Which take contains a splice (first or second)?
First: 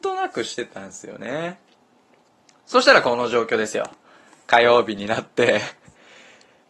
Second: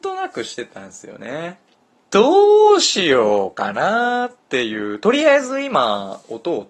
second